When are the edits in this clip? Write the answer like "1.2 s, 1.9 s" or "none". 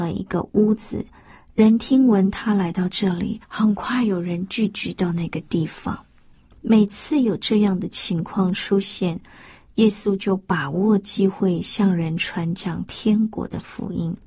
3.4 s

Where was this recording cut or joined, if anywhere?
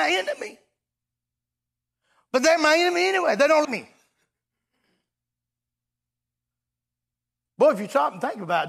3.6 s

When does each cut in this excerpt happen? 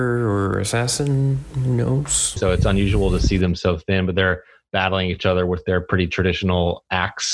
2.4 s

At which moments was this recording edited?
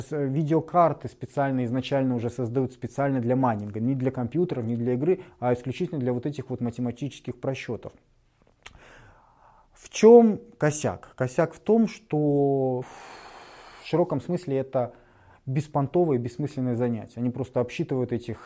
12.8 s

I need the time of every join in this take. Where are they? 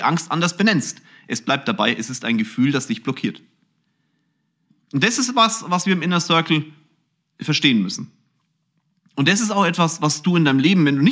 none

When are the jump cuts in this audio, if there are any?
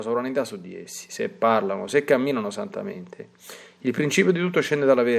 1.9 s

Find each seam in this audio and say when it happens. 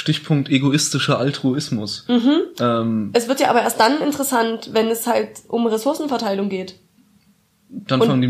none

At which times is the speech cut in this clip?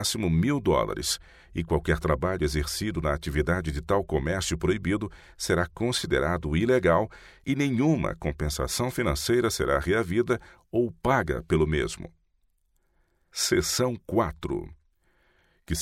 none

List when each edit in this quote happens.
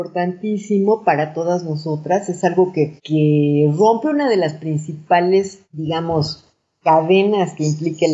3.0 s, 5.6 s

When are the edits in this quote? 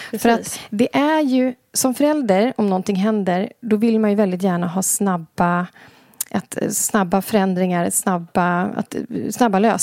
none

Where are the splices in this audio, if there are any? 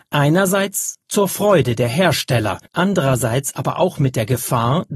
2.7 s

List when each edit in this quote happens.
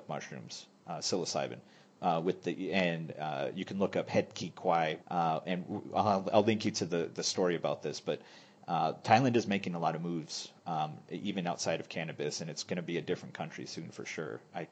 5.0 s

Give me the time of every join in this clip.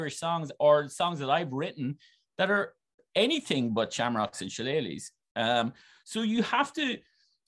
none

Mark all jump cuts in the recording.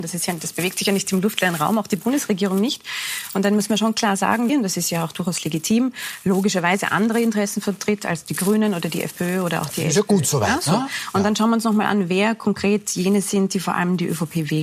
4.5 s

